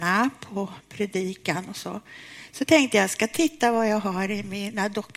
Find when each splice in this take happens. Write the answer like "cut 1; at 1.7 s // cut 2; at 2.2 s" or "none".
none